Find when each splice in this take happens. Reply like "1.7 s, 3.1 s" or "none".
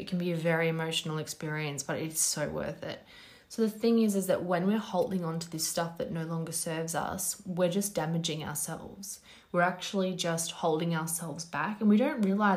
none